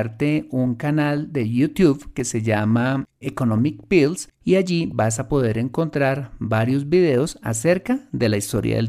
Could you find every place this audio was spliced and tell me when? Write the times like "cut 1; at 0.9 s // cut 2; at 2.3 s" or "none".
cut 1; at 3.2 s